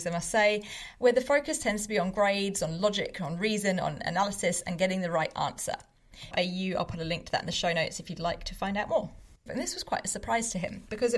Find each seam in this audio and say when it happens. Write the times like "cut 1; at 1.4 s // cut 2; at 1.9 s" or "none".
cut 1; at 6.3 s // cut 2; at 9.5 s